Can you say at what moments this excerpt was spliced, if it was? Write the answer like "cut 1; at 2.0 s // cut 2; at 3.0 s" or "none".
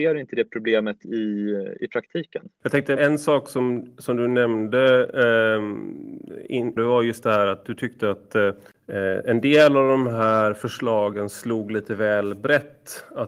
cut 1; at 3.0 s // cut 2; at 6.8 s